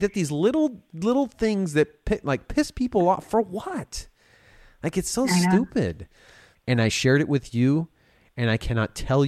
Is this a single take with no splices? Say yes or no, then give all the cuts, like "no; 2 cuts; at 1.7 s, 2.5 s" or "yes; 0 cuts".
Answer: no; 1 cut; at 6.5 s